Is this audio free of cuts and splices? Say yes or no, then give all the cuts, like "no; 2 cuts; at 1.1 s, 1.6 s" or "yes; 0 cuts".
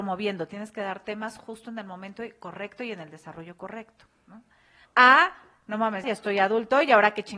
no; 2 cuts; at 4.8 s, 6.0 s